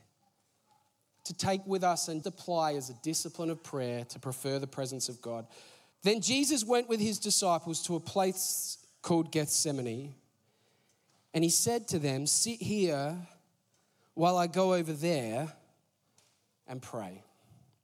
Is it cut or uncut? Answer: cut